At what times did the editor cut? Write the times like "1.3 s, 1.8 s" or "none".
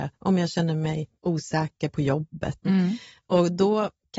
1.2 s, 2.6 s